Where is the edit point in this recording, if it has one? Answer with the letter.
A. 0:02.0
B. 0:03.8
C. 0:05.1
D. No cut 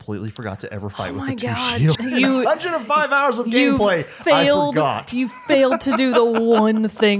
A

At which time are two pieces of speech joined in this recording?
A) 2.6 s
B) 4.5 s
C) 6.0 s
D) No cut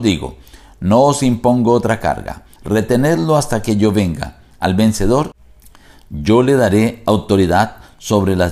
A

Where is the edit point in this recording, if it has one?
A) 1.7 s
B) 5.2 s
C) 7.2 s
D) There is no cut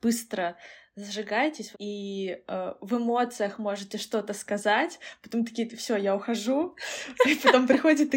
A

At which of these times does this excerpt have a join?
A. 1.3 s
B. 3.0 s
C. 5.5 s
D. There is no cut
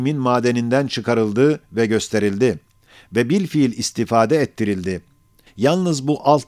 C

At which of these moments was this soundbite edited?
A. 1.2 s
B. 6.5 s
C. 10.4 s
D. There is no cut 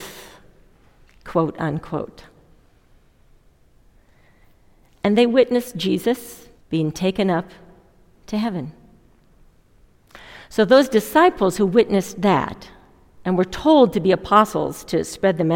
B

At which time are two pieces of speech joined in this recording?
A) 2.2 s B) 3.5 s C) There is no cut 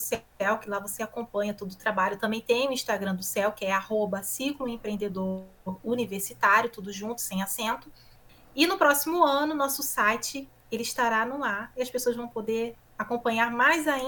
C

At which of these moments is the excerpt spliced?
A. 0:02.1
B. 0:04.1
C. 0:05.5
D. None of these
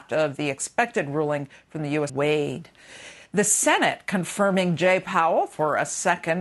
A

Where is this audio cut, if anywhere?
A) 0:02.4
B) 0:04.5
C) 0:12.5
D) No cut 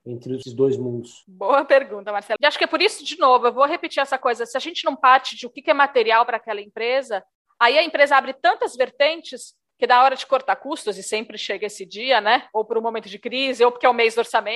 A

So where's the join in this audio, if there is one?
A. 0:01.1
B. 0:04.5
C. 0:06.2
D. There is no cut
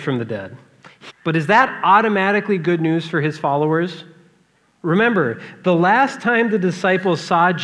A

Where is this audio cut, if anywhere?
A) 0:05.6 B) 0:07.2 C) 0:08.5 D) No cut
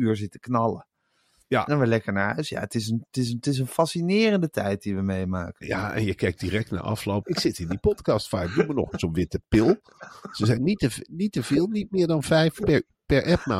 B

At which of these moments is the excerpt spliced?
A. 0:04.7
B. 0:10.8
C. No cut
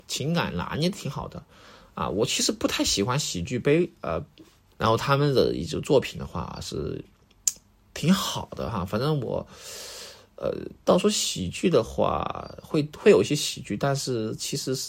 A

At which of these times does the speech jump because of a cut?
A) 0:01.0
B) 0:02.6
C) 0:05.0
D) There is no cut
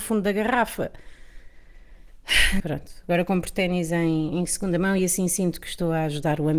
B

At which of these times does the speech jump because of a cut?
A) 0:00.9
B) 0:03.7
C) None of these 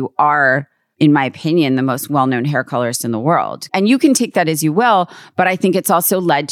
B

